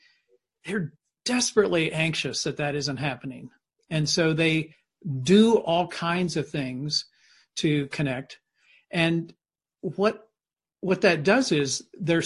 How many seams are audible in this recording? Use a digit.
0